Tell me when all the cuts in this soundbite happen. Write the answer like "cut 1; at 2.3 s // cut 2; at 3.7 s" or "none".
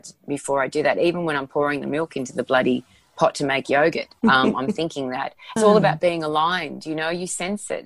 cut 1; at 4.2 s // cut 2; at 5.6 s